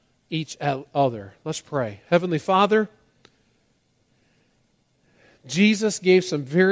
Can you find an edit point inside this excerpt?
no; 0 cuts

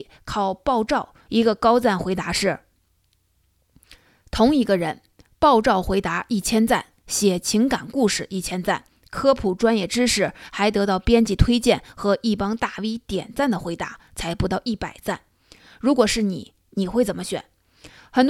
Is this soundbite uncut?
no; 1 cut; at 1.3 s

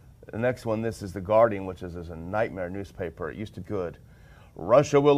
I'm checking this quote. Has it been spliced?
yes; 1 cut; at 3.6 s

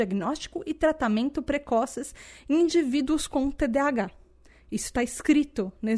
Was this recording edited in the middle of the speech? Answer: no; 0 cuts

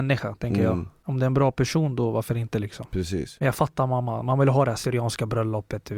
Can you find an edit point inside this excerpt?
no; 0 cuts

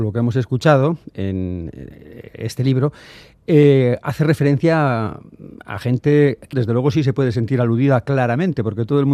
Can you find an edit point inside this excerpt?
yes; 1 cut; at 6.5 s

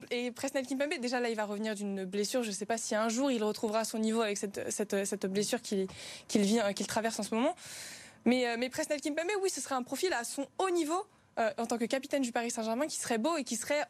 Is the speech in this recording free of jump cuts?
yes; 0 cuts

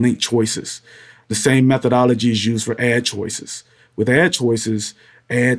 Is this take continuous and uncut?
yes; 0 cuts

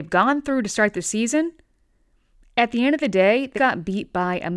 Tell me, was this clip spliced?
yes; 1 cut; at 3.5 s

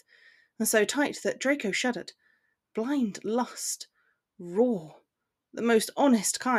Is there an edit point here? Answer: no; 0 cuts

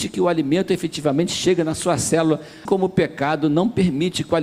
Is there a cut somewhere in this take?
yes; 1 cut; at 2.7 s

